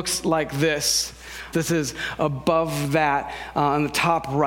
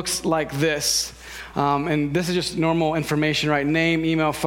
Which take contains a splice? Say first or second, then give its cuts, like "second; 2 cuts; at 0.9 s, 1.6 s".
first; 1 cut; at 1.5 s